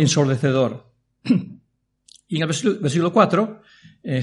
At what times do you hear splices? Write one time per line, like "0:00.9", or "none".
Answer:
none